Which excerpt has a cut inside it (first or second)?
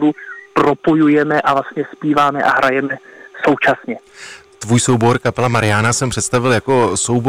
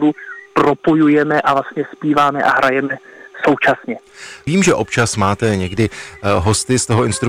second